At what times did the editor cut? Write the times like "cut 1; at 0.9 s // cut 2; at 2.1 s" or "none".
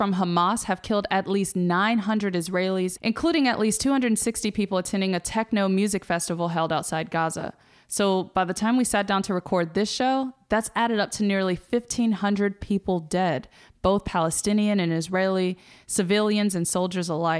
none